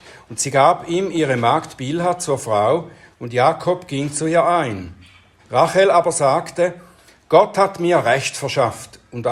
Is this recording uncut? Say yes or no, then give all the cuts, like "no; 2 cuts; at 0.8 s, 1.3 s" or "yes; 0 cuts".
no; 1 cut; at 5.4 s